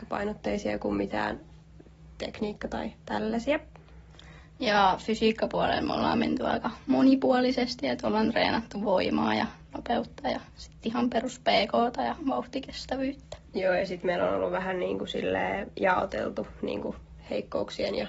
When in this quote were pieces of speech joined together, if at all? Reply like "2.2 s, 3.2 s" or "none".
13.4 s